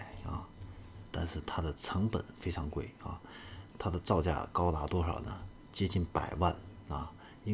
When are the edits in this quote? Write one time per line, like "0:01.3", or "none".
0:01.1
0:03.7